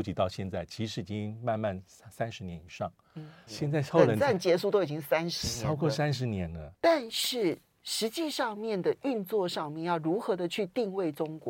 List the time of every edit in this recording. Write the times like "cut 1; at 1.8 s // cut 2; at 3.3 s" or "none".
cut 1; at 3.5 s // cut 2; at 6.7 s